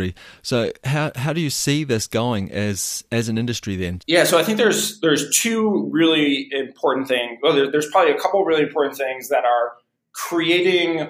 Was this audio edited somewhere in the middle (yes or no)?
yes